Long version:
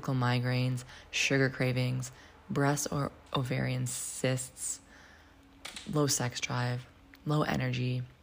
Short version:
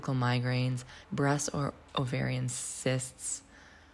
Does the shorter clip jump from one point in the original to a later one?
yes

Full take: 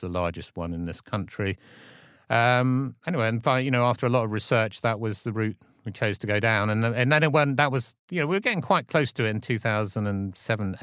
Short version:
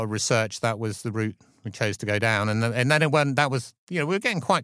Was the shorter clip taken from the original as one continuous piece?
yes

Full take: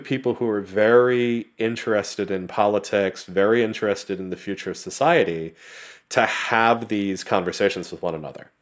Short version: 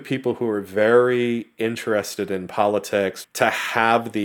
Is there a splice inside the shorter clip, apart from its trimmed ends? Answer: yes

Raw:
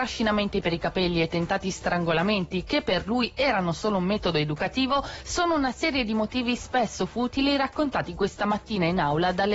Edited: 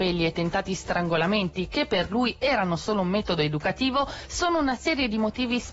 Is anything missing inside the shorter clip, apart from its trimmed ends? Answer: no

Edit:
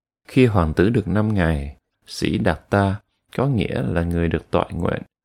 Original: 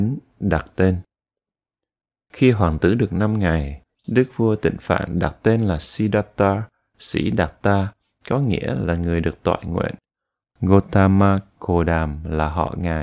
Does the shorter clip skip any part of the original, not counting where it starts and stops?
yes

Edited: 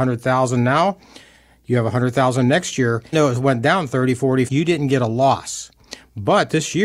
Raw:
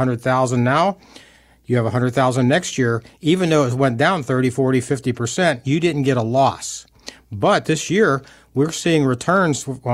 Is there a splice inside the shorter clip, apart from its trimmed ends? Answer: yes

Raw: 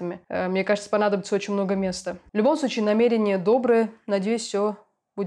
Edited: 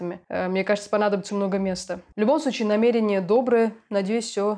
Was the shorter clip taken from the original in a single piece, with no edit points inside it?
no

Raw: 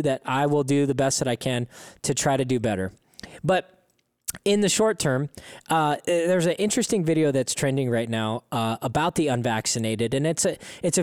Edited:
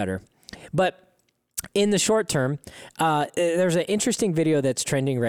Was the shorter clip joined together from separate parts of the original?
no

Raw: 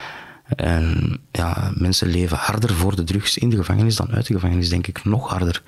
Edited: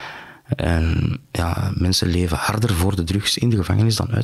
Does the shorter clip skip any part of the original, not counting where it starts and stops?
no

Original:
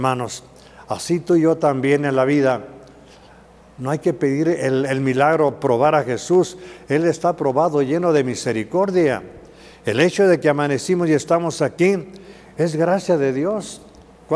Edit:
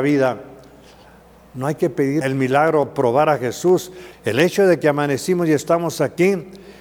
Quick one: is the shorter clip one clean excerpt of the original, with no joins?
no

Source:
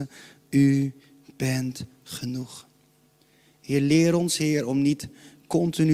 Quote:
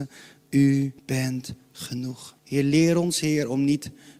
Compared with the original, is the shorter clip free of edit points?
no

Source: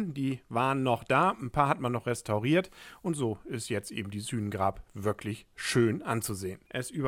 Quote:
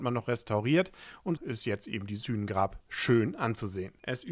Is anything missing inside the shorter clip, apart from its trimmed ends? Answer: yes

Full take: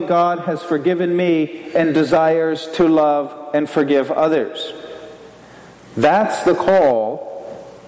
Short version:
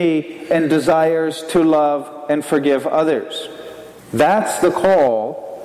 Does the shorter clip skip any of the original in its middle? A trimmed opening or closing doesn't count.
yes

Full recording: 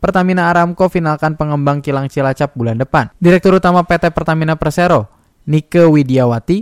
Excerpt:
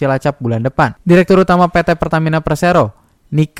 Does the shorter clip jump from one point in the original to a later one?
no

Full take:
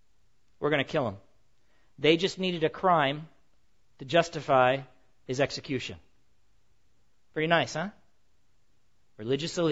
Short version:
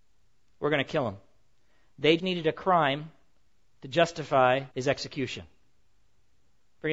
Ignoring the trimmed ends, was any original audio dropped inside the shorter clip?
yes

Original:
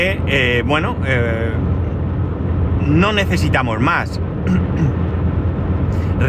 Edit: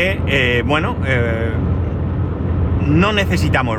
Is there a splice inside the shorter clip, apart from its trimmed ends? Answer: no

